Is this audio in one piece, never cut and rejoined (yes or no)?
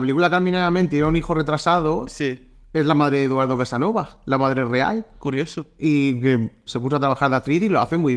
no